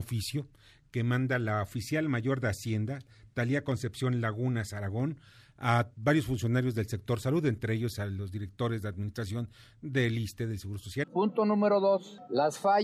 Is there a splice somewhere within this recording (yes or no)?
yes